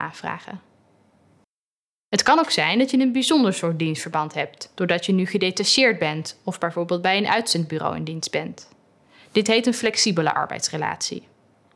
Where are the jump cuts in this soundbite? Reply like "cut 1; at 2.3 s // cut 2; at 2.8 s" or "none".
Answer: none

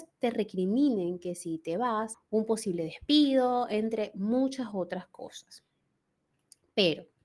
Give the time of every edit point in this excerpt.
cut 1; at 2.1 s

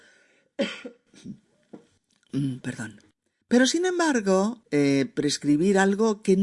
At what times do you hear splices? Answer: cut 1; at 3.4 s // cut 2; at 4.6 s

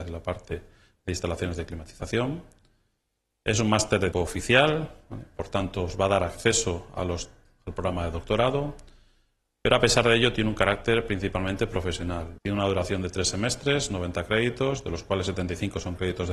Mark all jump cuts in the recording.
cut 1; at 4.1 s // cut 2; at 12.4 s

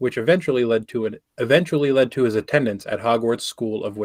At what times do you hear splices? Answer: cut 1; at 1.3 s

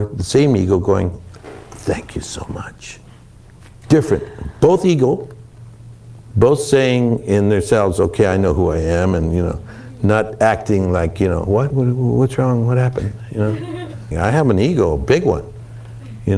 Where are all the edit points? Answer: cut 1; at 11.7 s // cut 2; at 14.1 s

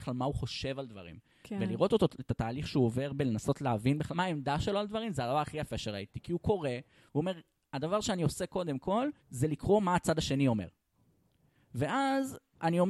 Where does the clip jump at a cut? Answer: cut 1; at 4.1 s // cut 2; at 9.2 s

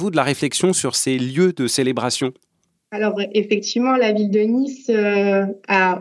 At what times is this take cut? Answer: none

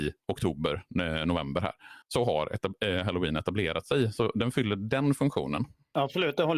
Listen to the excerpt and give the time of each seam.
cut 1; at 2.0 s

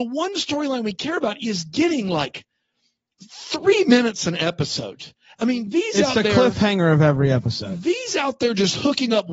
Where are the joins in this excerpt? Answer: none

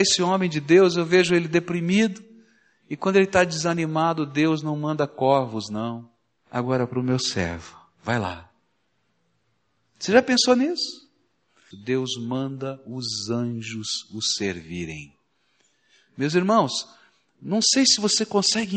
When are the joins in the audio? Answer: cut 1; at 6.4 s // cut 2; at 11.7 s

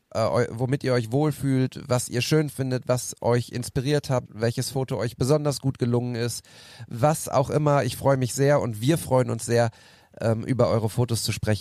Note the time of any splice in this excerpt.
cut 1; at 4.3 s

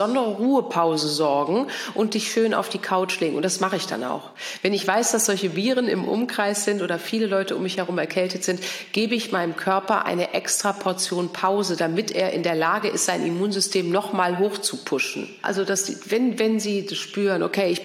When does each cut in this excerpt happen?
cut 1; at 15.4 s

